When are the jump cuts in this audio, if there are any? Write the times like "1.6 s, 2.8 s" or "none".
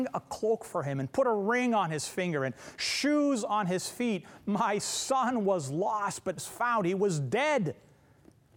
6.4 s